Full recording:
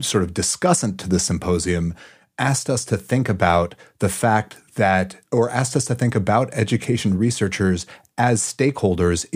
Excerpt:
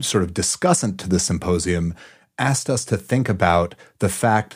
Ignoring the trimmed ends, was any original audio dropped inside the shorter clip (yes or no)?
no